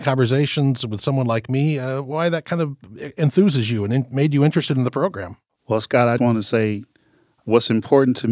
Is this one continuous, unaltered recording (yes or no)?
no